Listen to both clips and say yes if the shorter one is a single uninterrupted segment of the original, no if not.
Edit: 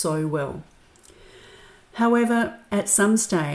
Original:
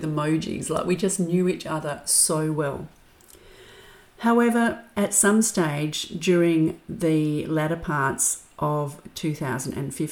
yes